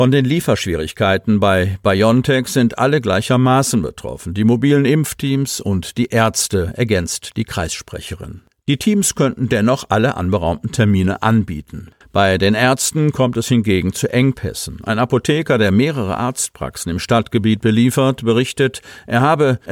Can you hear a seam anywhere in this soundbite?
yes; 1 cut; at 12.0 s

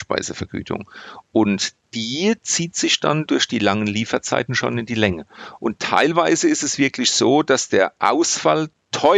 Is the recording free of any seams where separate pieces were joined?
yes; 0 cuts

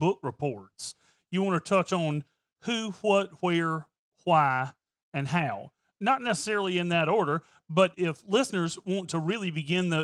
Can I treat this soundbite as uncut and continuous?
no; 1 cut; at 3.4 s

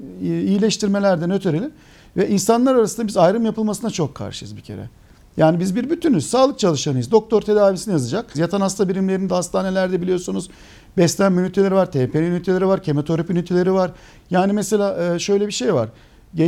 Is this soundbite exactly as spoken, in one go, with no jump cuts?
no; 2 cuts; at 8.3 s, 14.2 s

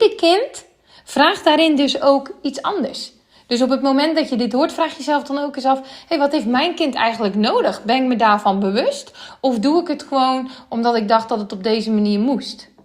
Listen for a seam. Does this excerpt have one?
no; 0 cuts

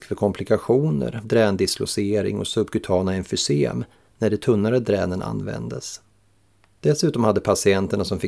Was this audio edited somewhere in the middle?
yes; 1 cut; at 1.2 s

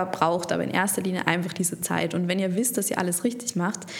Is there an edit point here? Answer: no; 0 cuts

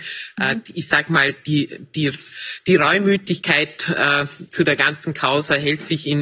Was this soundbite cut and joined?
no; 0 cuts

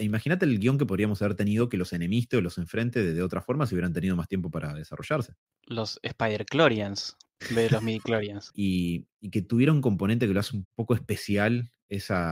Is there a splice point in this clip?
yes; 2 cuts; at 8.5 s, 10.6 s

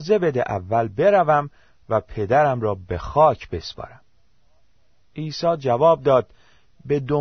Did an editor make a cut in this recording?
no; 0 cuts

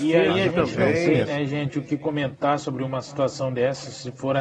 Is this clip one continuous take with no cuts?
yes; 0 cuts

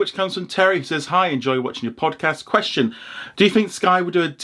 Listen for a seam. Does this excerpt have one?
yes; 1 cut; at 3.3 s

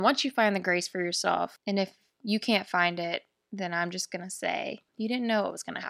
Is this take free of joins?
yes; 0 cuts

